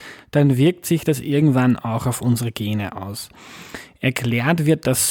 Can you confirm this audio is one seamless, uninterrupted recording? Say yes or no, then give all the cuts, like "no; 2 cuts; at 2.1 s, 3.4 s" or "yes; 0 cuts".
yes; 0 cuts